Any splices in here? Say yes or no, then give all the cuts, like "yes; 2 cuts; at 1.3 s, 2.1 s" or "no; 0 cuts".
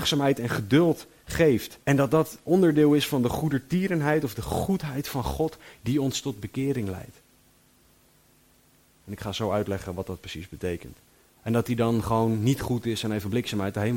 yes; 3 cuts; at 1.8 s, 9.0 s, 11.3 s